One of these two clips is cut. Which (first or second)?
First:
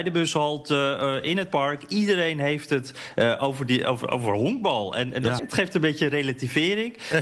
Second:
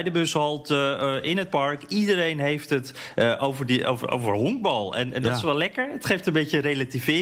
first